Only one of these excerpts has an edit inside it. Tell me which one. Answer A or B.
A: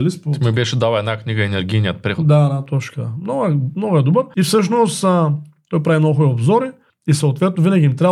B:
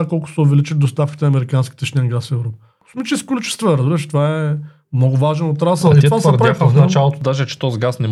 A